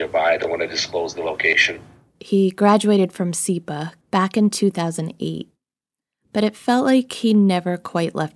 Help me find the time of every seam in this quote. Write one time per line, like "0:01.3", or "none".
0:02.2
0:04.0